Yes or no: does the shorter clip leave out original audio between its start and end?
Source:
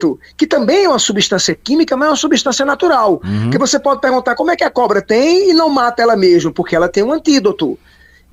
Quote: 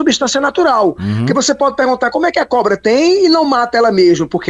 no